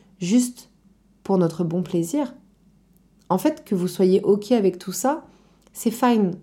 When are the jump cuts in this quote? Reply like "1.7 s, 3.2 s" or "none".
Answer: none